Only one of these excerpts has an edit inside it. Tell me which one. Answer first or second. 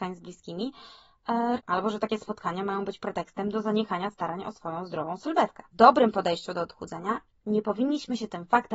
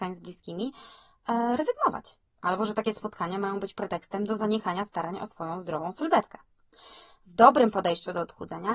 first